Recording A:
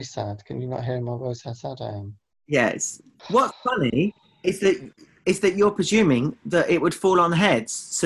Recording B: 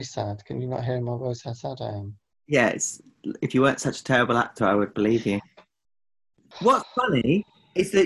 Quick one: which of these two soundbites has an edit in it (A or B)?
A